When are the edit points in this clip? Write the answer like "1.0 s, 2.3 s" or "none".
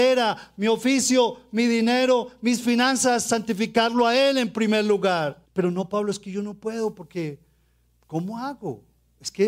5.5 s